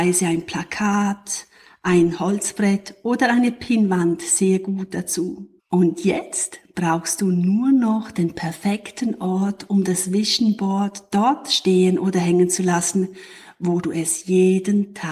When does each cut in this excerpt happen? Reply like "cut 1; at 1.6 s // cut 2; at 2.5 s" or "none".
cut 1; at 5.6 s